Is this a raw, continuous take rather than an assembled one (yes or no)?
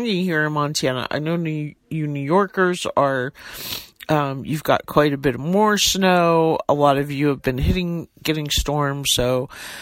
yes